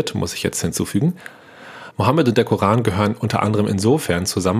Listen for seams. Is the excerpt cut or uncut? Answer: cut